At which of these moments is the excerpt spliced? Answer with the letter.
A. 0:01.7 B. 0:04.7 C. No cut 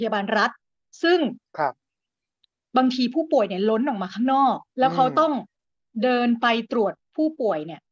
B